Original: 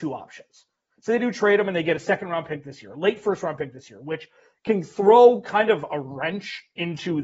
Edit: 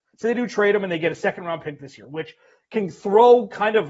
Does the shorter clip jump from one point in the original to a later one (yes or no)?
yes